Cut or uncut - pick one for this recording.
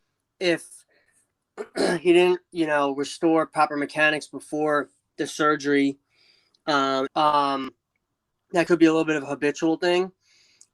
cut